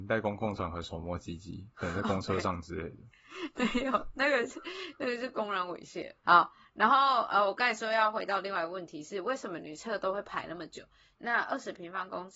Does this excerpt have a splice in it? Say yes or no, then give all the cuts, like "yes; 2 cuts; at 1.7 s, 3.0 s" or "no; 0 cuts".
yes; 2 cuts; at 6.2 s, 11.1 s